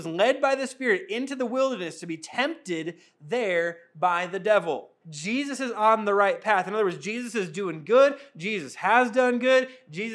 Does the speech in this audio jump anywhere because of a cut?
yes; 1 cut; at 5.0 s

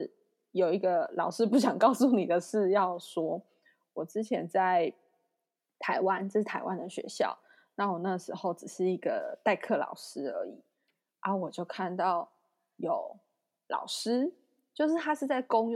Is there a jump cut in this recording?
no; 0 cuts

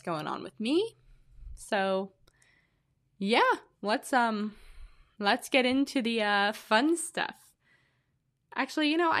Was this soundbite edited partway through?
no; 0 cuts

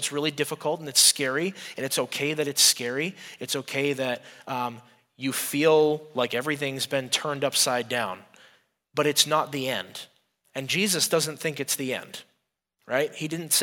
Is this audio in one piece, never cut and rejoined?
yes; 0 cuts

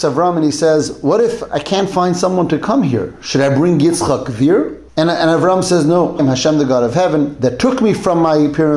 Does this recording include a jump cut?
yes; 2 cuts; at 4.9 s, 6.2 s

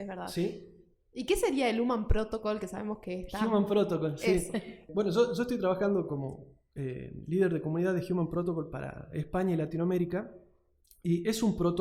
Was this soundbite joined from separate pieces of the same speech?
no; 0 cuts

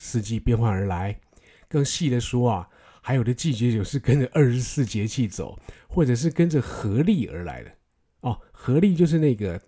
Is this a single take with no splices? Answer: yes; 0 cuts

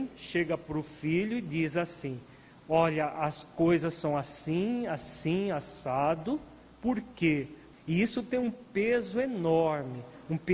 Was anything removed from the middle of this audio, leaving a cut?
yes; 1 cut; at 7.7 s

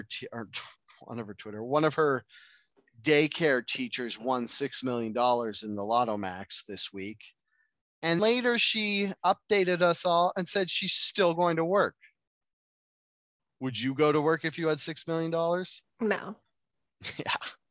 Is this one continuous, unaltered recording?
no; 1 cut; at 8.2 s

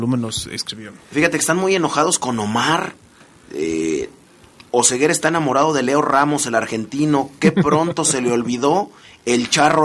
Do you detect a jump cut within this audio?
no; 0 cuts

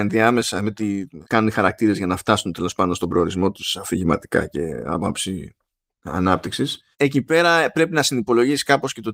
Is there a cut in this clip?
yes; 2 cuts; at 1.2 s, 6.9 s

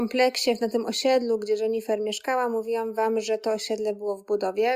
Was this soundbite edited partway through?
no; 0 cuts

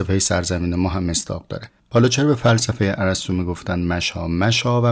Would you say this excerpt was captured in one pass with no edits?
yes; 0 cuts

